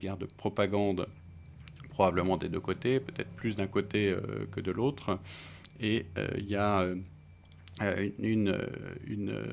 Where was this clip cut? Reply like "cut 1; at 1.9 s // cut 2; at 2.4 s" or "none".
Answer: none

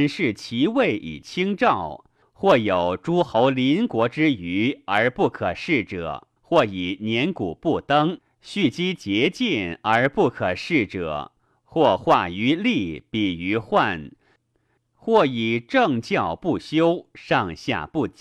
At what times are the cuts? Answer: cut 1; at 2.2 s // cut 2; at 6.4 s // cut 3; at 14.8 s

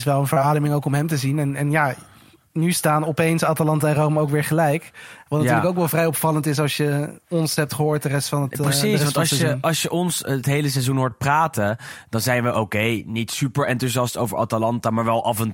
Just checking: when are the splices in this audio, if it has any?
none

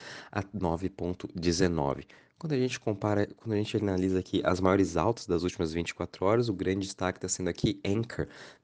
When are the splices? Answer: none

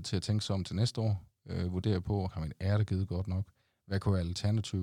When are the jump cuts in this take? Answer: cut 1; at 2.3 s

